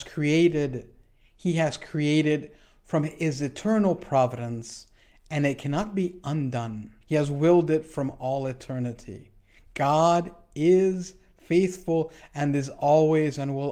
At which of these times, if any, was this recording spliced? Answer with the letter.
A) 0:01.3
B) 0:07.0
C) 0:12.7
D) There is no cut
B